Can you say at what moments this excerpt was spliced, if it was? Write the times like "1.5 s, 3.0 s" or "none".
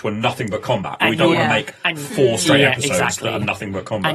none